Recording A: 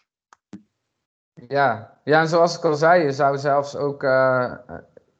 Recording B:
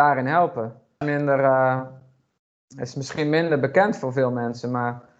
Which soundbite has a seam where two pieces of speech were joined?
B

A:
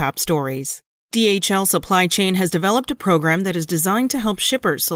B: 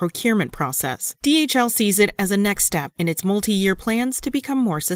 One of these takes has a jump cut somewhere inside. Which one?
A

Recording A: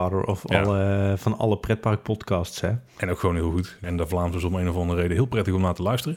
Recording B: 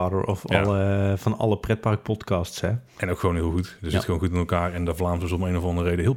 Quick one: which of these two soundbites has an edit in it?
A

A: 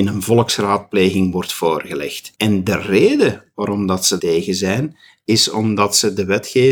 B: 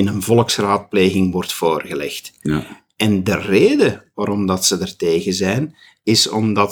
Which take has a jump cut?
A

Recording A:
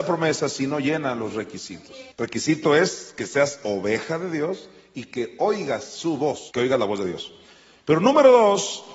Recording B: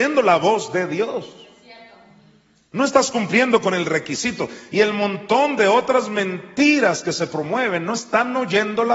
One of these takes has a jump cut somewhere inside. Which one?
A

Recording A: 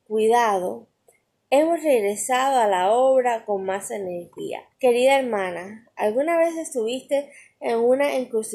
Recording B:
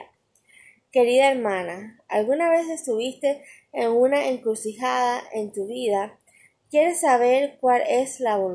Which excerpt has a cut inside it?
A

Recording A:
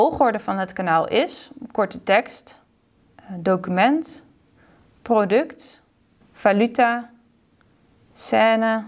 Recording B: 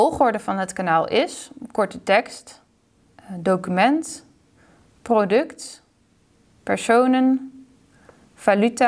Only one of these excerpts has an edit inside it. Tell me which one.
A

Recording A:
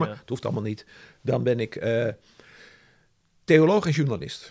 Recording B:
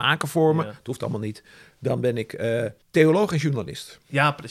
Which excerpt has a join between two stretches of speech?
B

